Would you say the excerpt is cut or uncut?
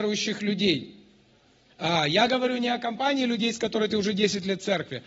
cut